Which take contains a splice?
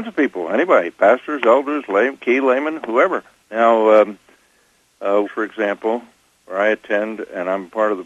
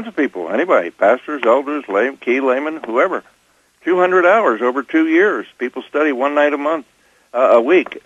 first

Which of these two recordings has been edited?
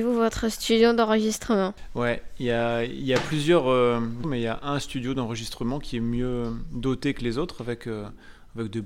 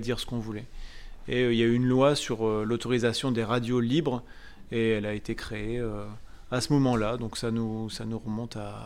first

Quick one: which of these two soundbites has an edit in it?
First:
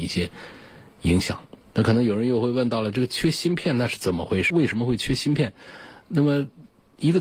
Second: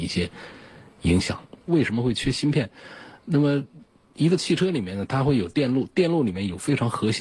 second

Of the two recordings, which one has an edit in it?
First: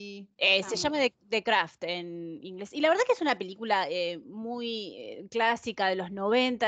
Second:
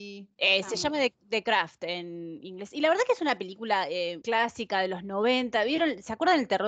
second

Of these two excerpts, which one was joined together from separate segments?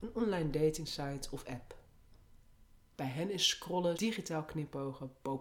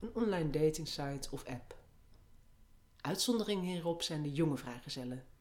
first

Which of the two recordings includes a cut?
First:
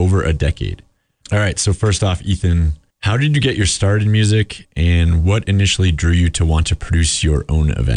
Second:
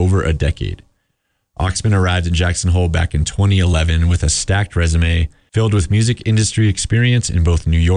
first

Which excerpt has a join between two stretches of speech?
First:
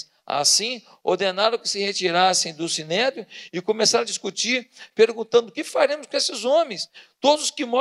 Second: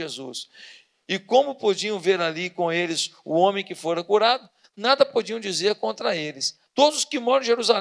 second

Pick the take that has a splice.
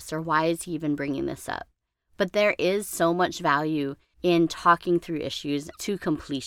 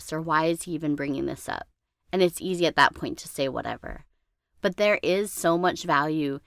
first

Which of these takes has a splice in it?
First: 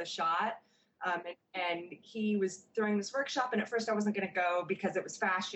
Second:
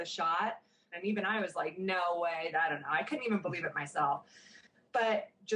second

